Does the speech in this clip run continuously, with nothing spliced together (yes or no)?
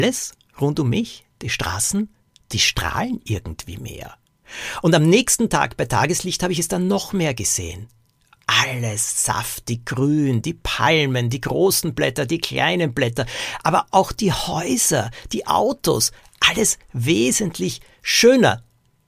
yes